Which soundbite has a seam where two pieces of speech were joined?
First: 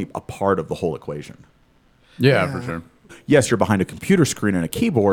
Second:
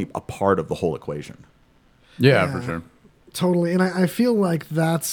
first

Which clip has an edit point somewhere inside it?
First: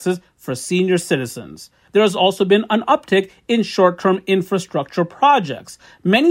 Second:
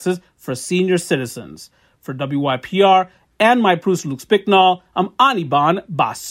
first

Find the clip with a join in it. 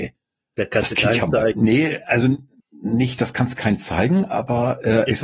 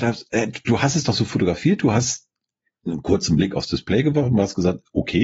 first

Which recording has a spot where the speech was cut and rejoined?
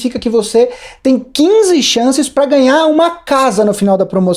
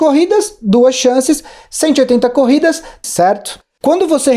second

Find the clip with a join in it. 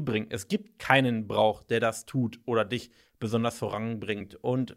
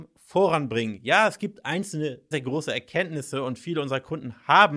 second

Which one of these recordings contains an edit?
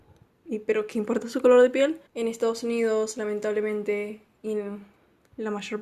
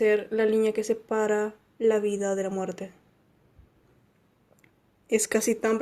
first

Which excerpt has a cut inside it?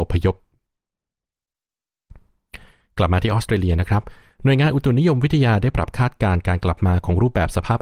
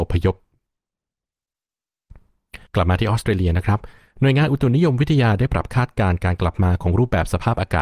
second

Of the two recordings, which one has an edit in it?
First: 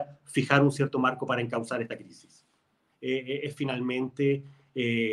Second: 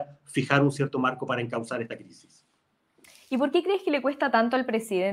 first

